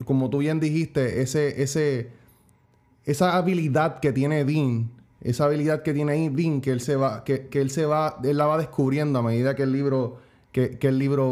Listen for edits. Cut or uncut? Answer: uncut